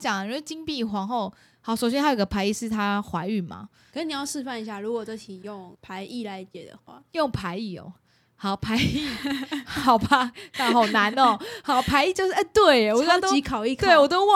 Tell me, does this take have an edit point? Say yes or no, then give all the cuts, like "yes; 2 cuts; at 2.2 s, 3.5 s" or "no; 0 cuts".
yes; 1 cut; at 3.9 s